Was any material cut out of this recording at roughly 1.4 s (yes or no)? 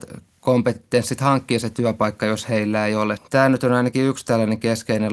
no